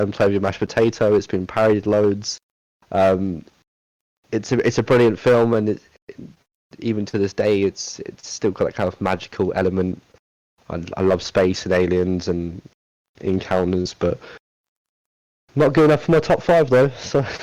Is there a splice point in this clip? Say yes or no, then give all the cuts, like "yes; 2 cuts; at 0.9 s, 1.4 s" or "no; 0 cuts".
no; 0 cuts